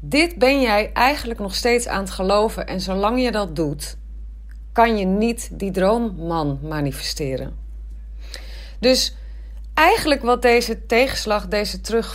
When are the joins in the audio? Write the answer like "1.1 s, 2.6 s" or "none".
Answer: 8.8 s